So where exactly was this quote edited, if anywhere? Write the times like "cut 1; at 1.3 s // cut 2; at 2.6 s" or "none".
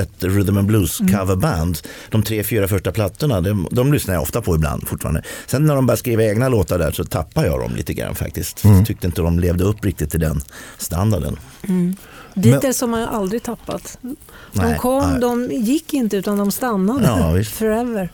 none

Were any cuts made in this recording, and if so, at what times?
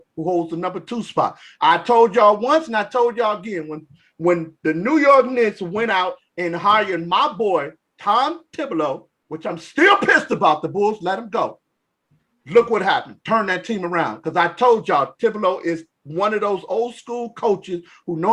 none

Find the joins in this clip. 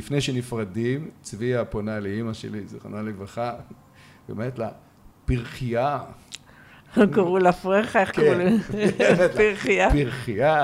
none

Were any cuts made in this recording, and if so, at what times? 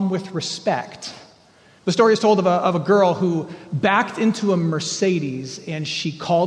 cut 1; at 1.8 s

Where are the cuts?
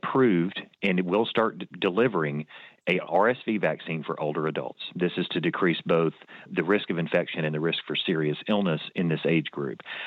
none

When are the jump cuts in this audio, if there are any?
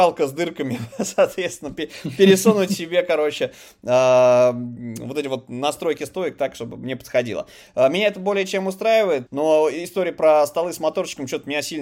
cut 1; at 9.3 s

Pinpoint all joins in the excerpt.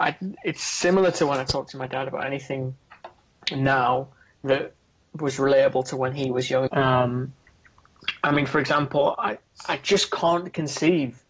cut 1; at 6.7 s

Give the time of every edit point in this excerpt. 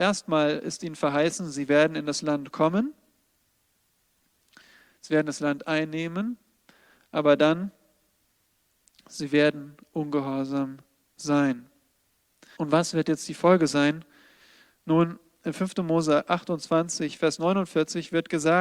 cut 1; at 12.6 s

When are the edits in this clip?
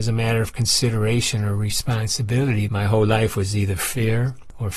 cut 1; at 2.7 s

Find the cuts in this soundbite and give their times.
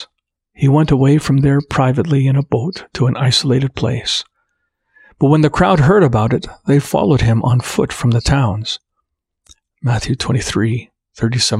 cut 1; at 9.6 s

